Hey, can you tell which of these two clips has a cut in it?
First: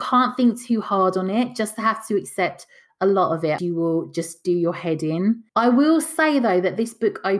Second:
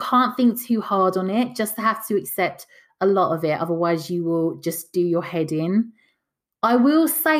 first; 2 cuts; at 3.6 s, 5.5 s

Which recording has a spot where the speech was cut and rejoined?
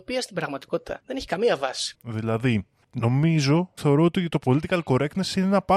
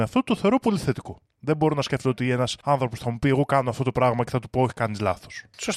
first; 2 cuts; at 1.9 s, 3.8 s

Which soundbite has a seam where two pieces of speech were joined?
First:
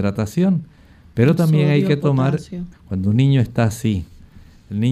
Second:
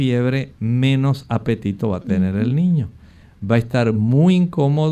first; 1 cut; at 2.7 s

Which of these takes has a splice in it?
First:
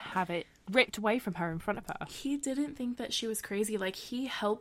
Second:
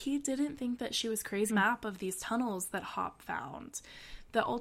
second; 1 cut; at 1.5 s

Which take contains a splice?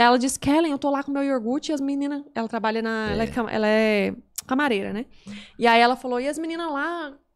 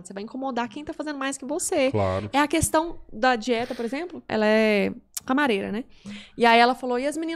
second; 1 cut; at 4.3 s

